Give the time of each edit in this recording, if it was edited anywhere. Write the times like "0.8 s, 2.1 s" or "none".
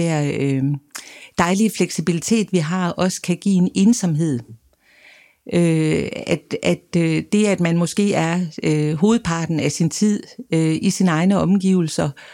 none